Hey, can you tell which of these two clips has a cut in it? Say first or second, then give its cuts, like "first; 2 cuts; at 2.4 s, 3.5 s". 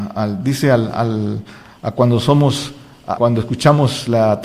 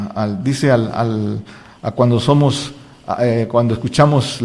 first; 1 cut; at 3.2 s